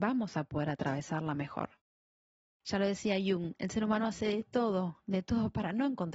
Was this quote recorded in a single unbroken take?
no; 1 cut; at 2.6 s

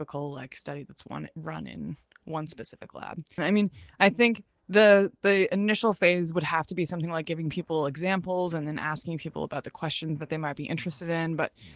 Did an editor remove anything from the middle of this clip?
yes; 1 cut; at 3.4 s

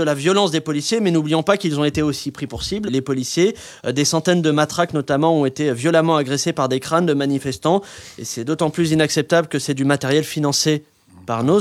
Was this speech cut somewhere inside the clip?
yes; 1 cut; at 2.9 s

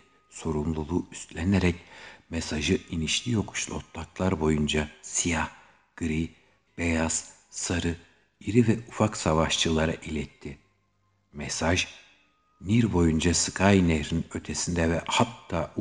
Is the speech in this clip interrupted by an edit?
yes; 1 cut; at 6.7 s

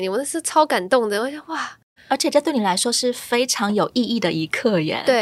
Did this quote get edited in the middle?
yes; 1 cut; at 2.0 s

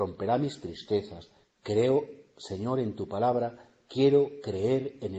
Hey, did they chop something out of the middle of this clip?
yes; 1 cut; at 1.4 s

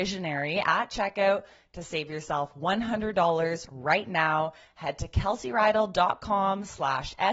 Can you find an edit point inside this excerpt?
no; 0 cuts

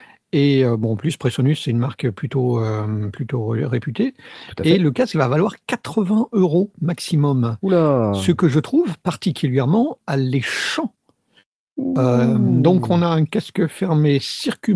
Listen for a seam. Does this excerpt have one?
no; 0 cuts

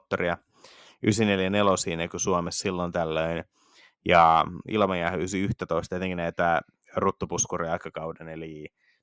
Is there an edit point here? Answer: no; 0 cuts

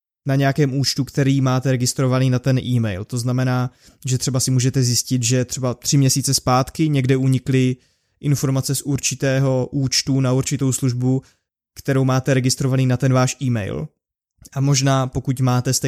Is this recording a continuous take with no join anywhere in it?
yes; 0 cuts

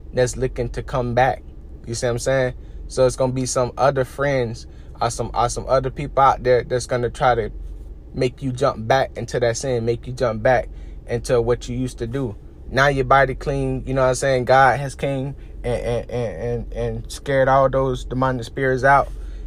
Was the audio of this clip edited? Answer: yes; 1 cut; at 12.7 s

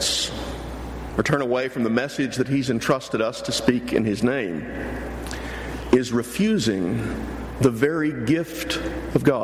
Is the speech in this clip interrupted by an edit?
yes; 1 cut; at 1.1 s

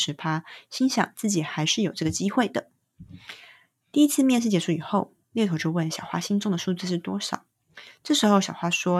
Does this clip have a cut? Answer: no; 0 cuts

